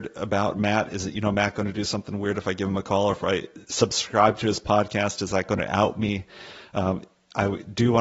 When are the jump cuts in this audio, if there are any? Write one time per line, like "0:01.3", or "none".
none